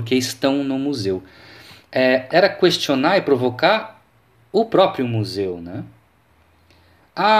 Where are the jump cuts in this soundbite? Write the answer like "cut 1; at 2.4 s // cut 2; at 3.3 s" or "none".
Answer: cut 1; at 2.3 s